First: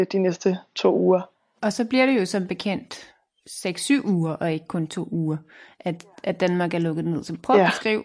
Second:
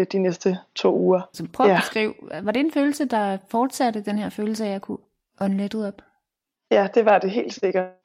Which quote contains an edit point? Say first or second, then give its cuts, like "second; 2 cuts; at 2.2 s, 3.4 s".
second; 1 cut; at 1.3 s